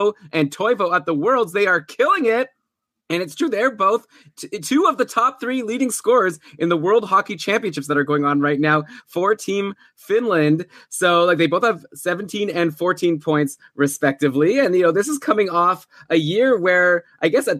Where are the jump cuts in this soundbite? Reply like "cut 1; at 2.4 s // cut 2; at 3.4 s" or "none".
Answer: none